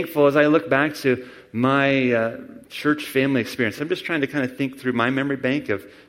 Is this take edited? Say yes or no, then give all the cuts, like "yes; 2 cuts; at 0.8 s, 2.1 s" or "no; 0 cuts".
no; 0 cuts